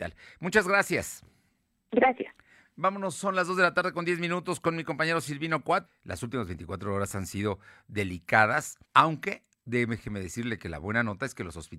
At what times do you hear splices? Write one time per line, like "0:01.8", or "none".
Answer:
0:05.9
0:08.8